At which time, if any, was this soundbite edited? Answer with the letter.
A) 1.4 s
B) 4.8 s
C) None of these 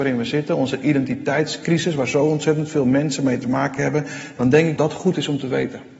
B